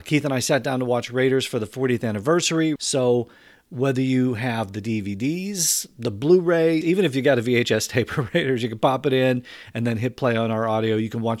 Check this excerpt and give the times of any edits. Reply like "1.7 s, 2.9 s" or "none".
2.8 s, 6.8 s